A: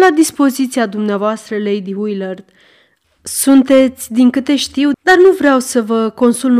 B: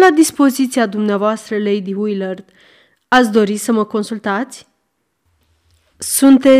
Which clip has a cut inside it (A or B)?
A